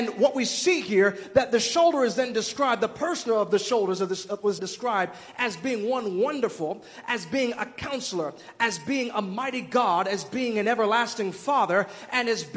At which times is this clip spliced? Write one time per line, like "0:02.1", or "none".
0:04.6